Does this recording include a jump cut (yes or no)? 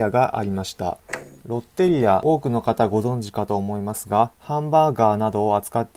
yes